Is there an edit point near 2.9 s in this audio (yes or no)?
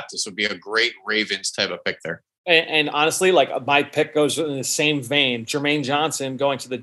no